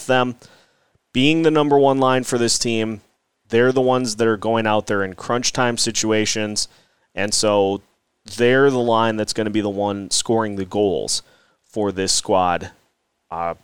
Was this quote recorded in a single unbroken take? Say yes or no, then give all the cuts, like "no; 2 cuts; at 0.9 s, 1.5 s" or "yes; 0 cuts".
yes; 0 cuts